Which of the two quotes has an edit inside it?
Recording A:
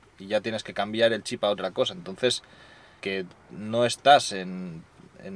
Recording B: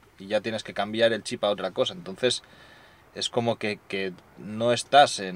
A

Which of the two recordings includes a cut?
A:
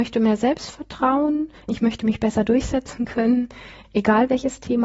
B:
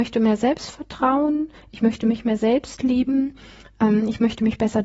A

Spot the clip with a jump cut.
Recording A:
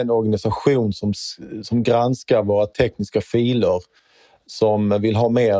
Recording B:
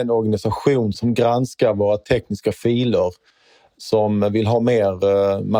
B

